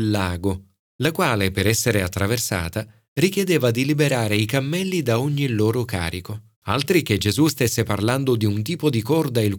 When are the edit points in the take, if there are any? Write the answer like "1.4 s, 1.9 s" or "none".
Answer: 6.5 s